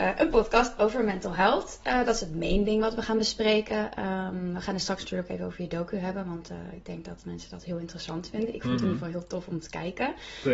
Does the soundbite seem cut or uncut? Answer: uncut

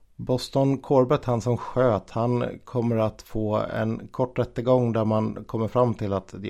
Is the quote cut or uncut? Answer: uncut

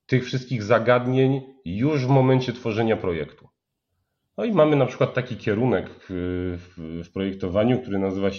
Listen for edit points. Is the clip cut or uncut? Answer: uncut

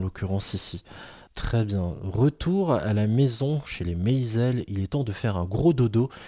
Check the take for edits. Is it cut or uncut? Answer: uncut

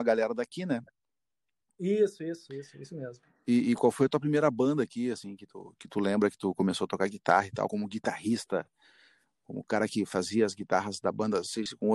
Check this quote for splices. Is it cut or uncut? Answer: uncut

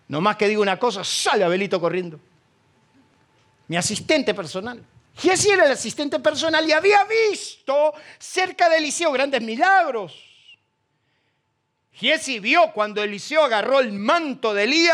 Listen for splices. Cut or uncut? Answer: uncut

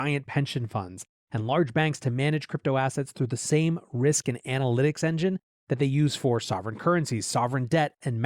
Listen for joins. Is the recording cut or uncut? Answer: uncut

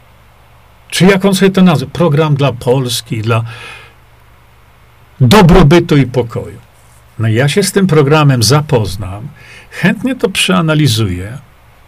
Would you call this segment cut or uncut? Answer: uncut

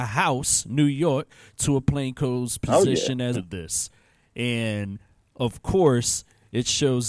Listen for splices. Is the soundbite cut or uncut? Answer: cut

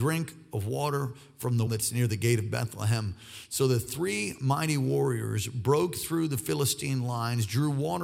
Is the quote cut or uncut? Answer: cut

